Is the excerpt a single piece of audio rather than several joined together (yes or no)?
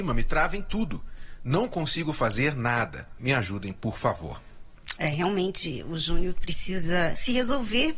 no